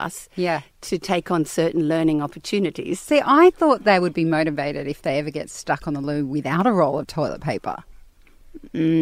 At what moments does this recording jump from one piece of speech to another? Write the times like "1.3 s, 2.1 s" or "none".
none